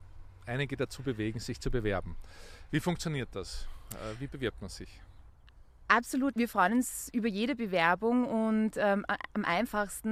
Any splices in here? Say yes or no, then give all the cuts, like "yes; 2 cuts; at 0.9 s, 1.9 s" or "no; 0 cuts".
yes; 1 cut; at 6.3 s